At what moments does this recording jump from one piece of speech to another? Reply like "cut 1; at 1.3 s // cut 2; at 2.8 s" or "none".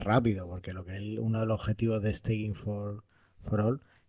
none

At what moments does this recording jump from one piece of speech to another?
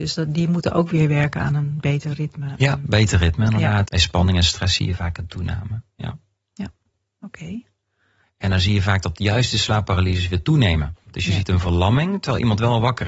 cut 1; at 3.9 s // cut 2; at 8.2 s // cut 3; at 11.1 s

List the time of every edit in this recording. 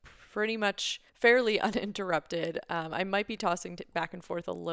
cut 1; at 1.1 s

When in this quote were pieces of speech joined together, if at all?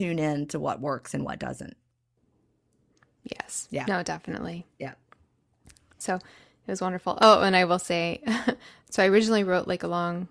none

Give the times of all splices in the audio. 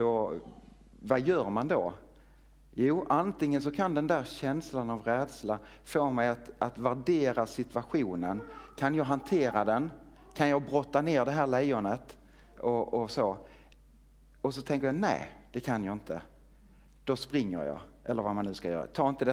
none

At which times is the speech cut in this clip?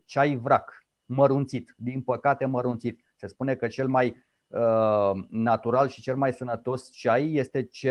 none

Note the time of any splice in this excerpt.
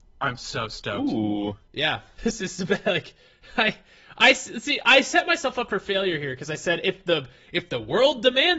cut 1; at 2.2 s

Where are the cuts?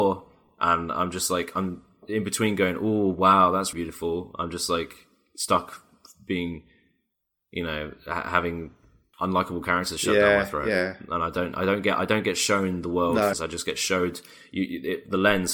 cut 1; at 3.7 s // cut 2; at 13.3 s

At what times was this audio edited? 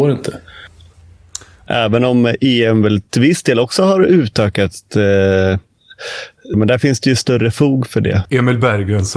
cut 1; at 1.7 s // cut 2; at 6.5 s // cut 3; at 8.2 s

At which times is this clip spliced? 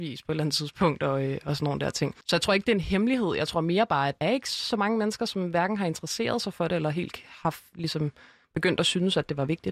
cut 1; at 2.2 s // cut 2; at 4.2 s // cut 3; at 6.7 s

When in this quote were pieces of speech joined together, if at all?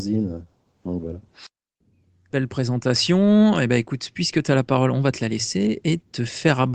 cut 1; at 2.3 s

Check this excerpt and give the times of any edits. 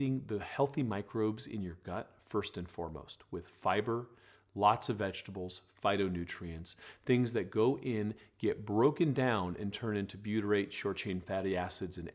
none

